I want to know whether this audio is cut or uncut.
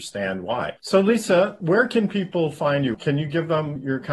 uncut